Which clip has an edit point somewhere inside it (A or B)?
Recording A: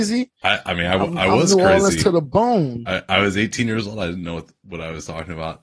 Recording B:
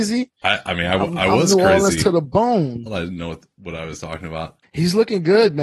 B